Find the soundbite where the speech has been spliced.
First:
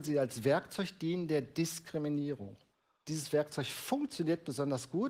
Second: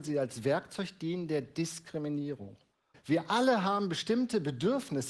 second; 1 cut; at 2.9 s

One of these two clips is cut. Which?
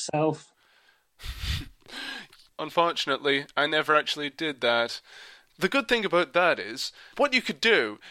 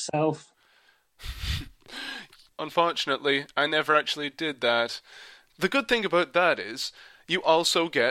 first; 1 cut; at 7.1 s

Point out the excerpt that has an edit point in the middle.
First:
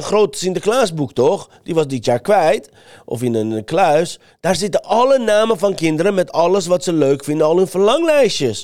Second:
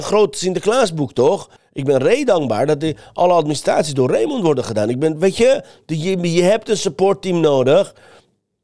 second; 1 cut; at 1.6 s

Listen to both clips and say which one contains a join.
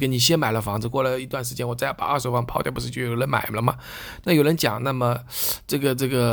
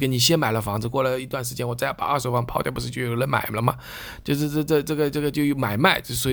first; 1 cut; at 4.2 s

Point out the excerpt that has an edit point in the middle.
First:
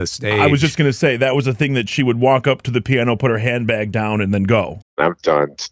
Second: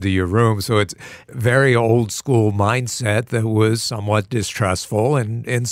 first; 1 cut; at 4.8 s

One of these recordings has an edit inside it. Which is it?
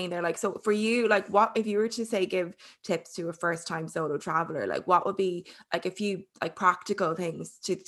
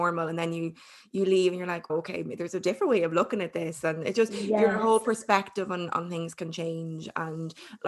second; 1 cut; at 1.9 s

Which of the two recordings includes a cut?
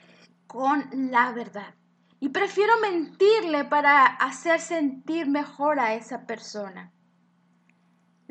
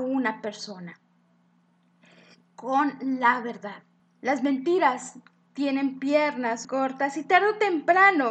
second; 2 cuts; at 4.0 s, 6.6 s

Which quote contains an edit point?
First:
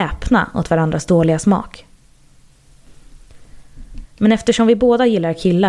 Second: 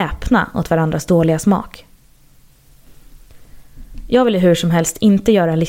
first; 1 cut; at 4.0 s

